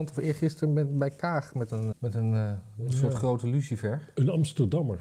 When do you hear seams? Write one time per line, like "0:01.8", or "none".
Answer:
0:01.9